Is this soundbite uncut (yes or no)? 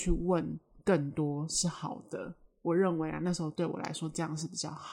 yes